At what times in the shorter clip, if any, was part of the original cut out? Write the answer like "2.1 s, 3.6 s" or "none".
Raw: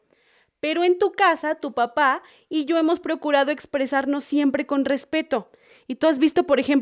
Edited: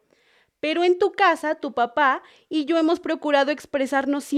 none

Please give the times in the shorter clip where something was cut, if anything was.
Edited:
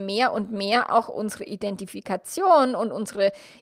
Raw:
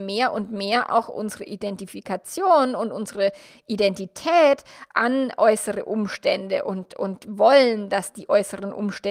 none

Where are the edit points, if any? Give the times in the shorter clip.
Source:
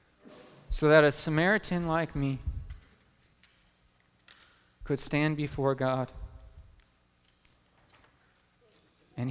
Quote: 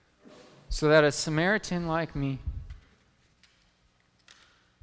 none

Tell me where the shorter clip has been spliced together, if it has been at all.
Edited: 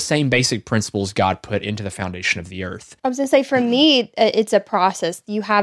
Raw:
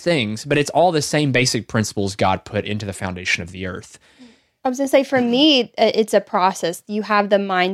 3.0 s

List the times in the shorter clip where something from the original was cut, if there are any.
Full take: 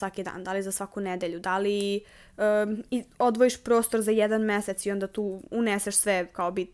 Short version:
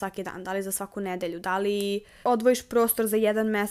2.2 s

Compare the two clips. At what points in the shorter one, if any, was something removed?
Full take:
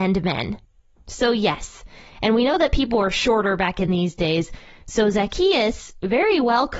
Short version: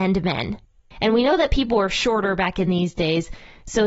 0.9 s

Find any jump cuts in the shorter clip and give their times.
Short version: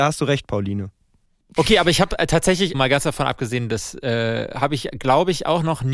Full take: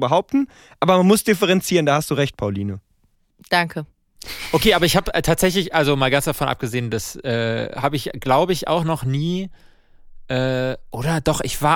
1.6 s, 2.7 s

